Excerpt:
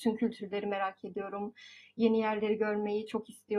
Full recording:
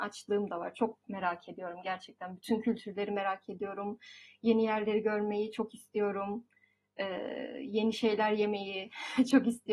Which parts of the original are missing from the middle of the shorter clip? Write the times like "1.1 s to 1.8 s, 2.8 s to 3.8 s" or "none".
none